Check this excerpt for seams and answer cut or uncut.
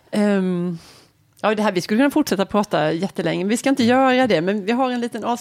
uncut